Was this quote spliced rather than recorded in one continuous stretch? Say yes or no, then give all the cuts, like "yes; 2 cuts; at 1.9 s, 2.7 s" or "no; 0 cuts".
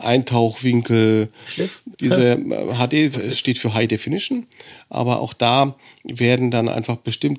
yes; 1 cut; at 1.9 s